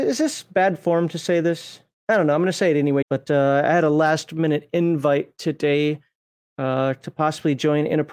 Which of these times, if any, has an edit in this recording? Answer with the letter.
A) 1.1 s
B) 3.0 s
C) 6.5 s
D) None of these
B